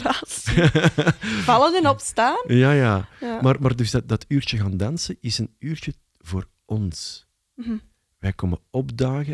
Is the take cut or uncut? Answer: uncut